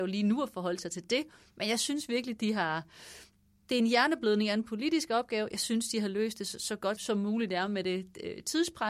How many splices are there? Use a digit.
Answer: 1